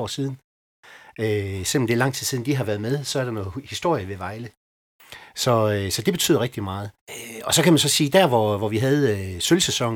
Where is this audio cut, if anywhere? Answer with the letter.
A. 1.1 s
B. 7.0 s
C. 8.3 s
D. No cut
B